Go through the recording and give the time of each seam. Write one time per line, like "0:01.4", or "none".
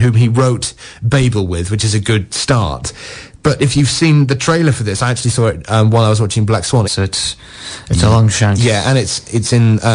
0:06.8